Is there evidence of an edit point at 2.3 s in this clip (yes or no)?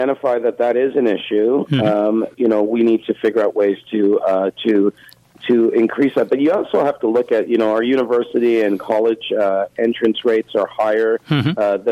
yes